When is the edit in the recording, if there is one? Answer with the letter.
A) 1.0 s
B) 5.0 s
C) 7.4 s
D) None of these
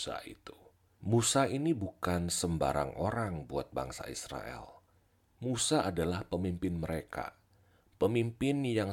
A